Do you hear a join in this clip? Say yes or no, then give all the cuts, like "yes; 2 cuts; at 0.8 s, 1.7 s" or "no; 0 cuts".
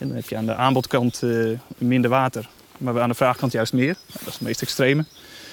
no; 0 cuts